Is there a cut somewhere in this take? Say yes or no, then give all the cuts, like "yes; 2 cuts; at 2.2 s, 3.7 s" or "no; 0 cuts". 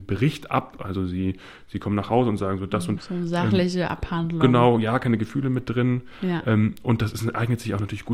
yes; 1 cut; at 3.0 s